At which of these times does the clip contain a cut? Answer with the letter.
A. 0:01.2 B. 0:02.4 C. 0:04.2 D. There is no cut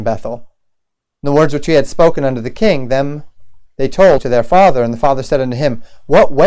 C